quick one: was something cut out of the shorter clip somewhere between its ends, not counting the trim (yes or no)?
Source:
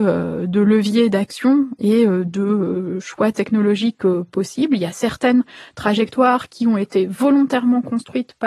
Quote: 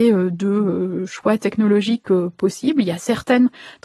no